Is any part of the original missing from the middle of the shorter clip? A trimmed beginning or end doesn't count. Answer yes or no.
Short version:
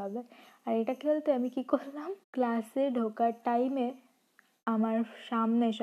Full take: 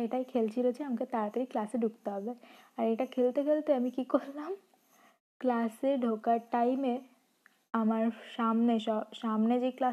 yes